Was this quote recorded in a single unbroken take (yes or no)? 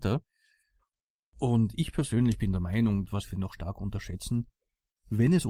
no